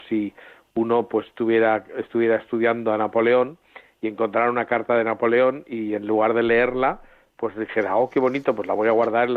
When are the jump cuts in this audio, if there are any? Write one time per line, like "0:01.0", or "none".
none